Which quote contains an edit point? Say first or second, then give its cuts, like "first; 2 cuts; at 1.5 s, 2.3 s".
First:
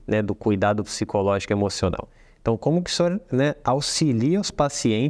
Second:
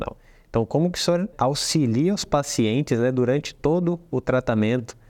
second; 1 cut; at 1.3 s